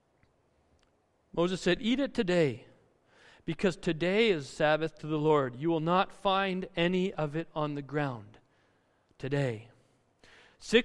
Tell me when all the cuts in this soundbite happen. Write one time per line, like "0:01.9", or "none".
none